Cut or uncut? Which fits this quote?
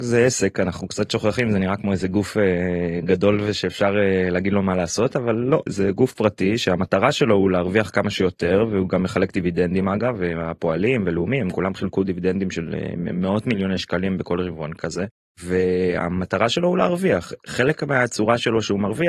cut